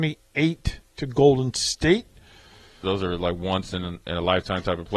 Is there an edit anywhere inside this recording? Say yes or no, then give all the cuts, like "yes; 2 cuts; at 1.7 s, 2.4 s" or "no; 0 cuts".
yes; 1 cut; at 2.8 s